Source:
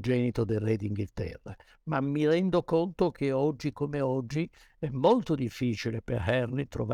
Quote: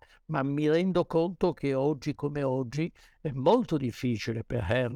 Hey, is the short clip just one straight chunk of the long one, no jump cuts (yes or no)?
yes